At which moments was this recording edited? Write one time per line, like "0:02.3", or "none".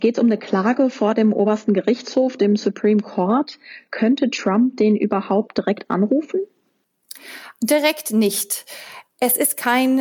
none

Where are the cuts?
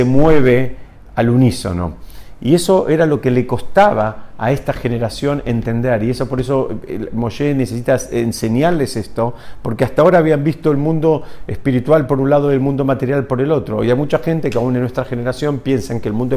none

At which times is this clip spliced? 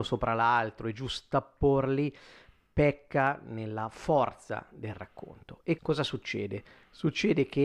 0:05.8

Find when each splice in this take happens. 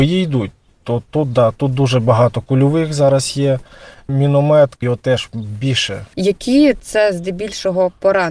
0:04.8
0:06.1

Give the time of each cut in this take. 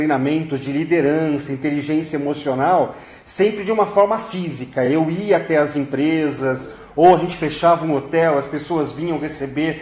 none

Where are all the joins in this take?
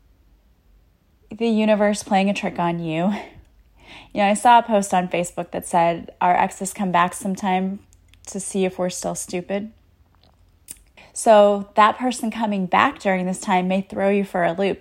0:11.0

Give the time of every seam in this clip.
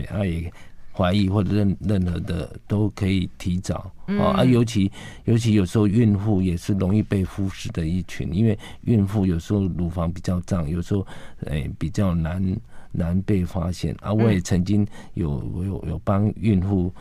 0:00.9

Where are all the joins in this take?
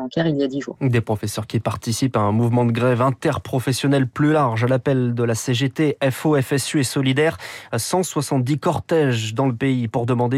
none

